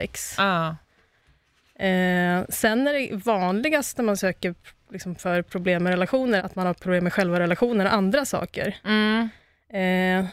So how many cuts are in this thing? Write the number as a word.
one